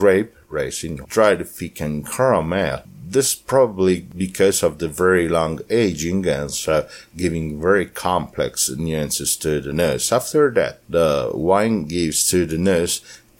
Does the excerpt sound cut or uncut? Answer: cut